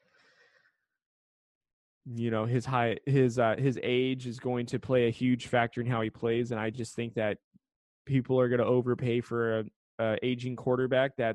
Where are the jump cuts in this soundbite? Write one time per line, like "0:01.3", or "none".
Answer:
none